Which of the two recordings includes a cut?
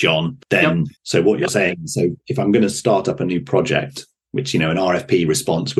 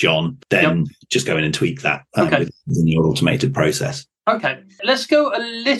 first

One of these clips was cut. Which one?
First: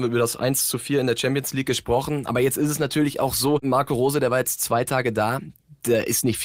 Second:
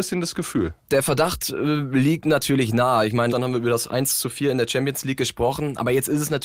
second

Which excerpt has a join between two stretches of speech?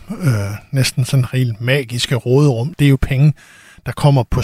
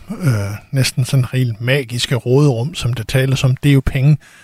first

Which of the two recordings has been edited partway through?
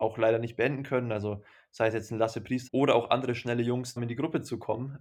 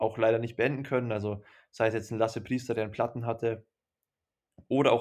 first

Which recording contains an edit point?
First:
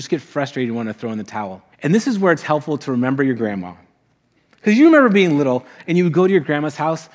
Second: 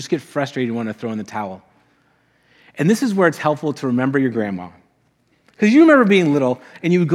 first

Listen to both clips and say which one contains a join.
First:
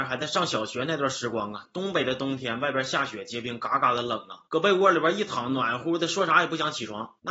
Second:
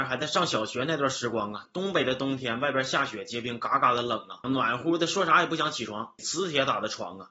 second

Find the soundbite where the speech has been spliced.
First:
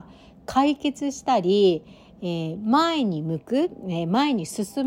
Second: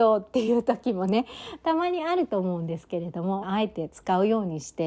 second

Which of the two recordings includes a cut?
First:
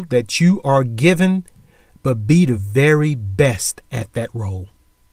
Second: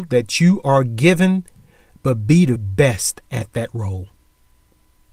second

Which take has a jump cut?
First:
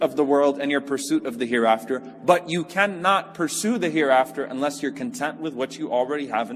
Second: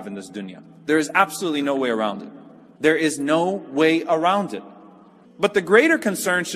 second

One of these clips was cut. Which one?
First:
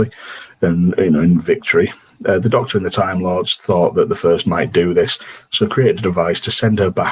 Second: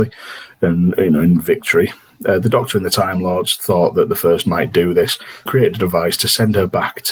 second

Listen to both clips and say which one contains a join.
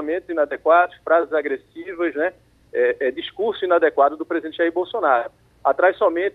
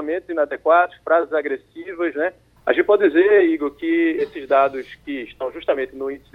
second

